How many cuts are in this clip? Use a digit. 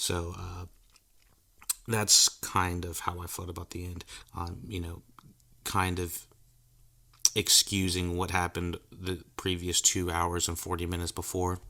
1